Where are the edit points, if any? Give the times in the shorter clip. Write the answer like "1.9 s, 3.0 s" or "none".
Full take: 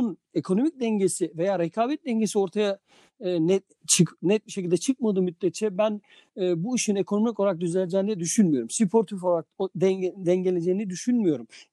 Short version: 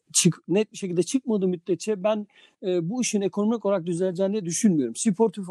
none